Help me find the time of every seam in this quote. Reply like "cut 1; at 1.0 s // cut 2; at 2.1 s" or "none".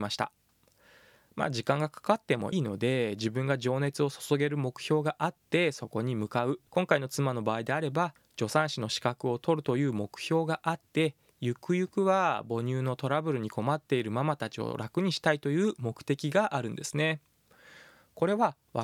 cut 1; at 2.5 s // cut 2; at 6.7 s